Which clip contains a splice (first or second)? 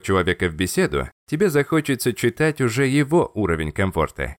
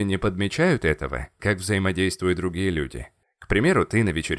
second